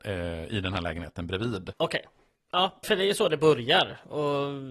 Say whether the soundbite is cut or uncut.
cut